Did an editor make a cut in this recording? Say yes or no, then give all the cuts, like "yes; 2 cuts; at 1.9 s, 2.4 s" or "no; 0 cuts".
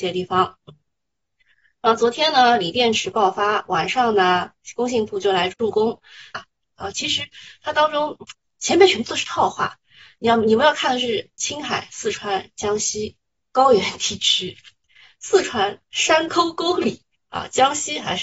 yes; 2 cuts; at 6.3 s, 13.4 s